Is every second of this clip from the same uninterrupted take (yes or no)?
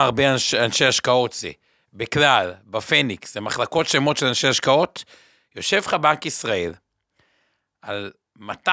yes